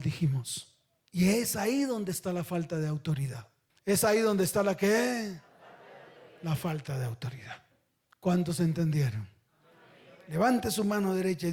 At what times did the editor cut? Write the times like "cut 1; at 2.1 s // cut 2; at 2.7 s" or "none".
none